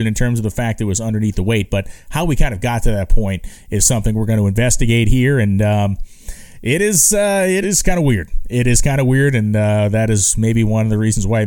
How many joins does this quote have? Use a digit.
1